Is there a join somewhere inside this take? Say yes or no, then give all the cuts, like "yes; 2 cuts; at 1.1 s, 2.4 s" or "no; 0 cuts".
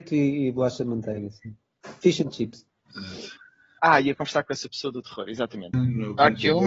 yes; 2 cuts; at 3.8 s, 5.7 s